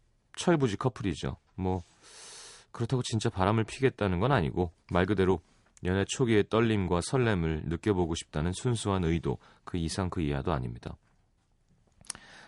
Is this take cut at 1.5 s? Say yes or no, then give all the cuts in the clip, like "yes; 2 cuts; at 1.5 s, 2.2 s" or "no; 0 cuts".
no; 1 cut; at 4.8 s